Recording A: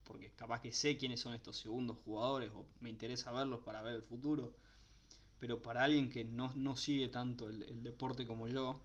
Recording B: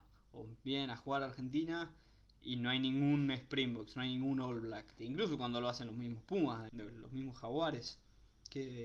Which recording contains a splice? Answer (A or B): B